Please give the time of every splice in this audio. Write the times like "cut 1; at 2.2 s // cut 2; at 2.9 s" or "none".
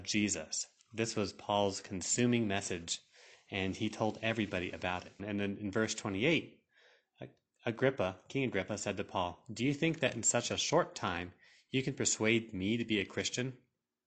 cut 1; at 5.2 s